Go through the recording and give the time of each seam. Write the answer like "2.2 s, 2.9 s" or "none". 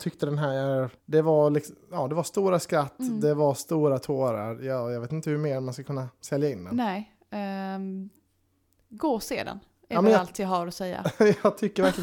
1.0 s